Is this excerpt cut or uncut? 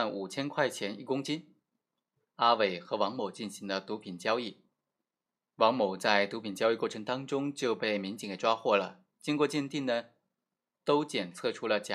cut